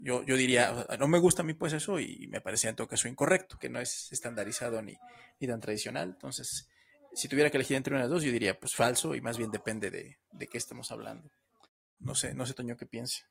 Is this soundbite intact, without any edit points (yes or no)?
no